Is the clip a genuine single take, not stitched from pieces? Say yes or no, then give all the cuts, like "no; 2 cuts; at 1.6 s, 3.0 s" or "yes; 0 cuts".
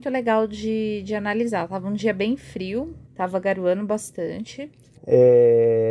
no; 2 cuts; at 3.0 s, 4.9 s